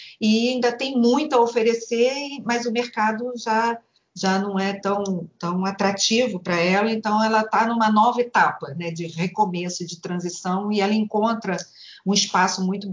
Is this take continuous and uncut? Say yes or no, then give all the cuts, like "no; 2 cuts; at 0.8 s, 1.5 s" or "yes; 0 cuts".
yes; 0 cuts